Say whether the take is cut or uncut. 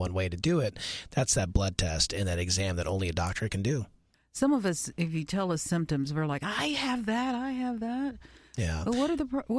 uncut